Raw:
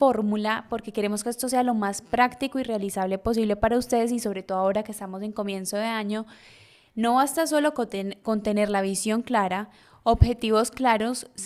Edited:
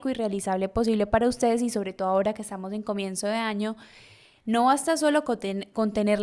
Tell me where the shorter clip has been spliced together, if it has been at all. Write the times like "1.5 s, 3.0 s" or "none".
none

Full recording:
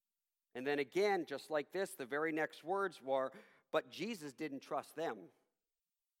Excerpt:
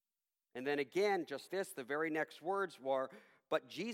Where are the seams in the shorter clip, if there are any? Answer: 1.5 s

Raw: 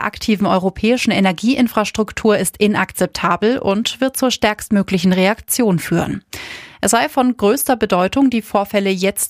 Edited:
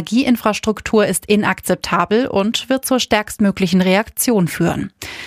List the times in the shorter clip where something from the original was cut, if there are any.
none

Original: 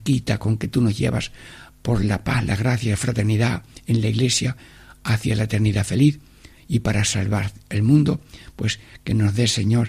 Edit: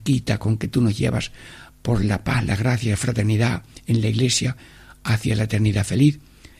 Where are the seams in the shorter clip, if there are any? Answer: none

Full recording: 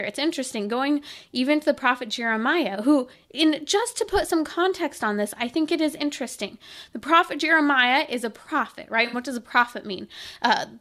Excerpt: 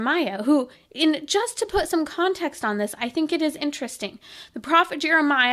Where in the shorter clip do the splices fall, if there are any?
none

